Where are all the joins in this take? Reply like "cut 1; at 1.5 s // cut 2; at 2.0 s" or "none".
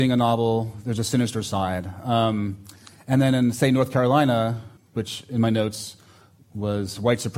cut 1; at 4.8 s